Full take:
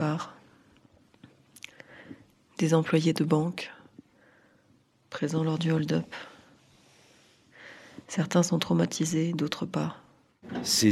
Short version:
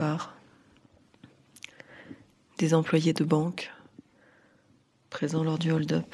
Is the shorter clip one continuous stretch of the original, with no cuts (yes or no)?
yes